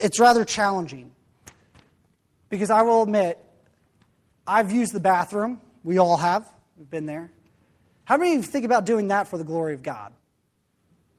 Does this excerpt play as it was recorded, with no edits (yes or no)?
yes